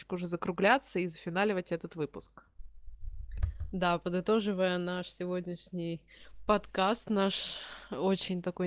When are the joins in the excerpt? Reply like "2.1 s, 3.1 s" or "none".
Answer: none